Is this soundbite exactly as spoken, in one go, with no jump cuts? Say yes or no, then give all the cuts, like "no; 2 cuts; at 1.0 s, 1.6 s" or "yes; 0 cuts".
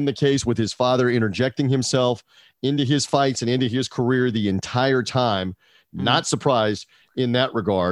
yes; 0 cuts